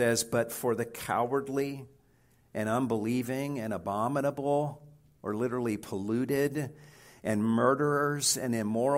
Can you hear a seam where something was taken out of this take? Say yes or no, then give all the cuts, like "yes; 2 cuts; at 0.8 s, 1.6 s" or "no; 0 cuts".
no; 0 cuts